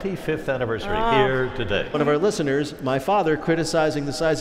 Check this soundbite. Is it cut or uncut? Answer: cut